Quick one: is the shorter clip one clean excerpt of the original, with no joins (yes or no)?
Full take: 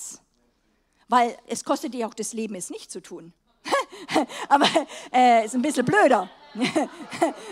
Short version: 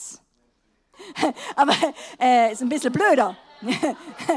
no